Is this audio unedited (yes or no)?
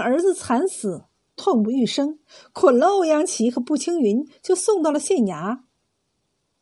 yes